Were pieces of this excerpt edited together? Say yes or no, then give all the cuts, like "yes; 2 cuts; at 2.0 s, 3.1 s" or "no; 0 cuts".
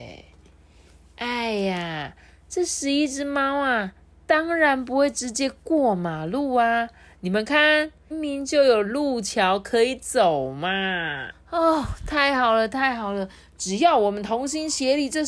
yes; 2 cuts; at 8.1 s, 11.3 s